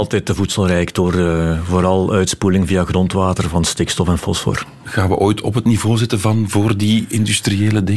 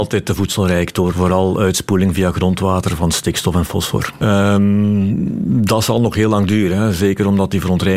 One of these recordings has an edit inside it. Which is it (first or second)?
second